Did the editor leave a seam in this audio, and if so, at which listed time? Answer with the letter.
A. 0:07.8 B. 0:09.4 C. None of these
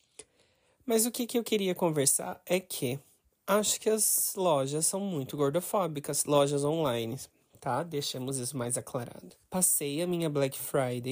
B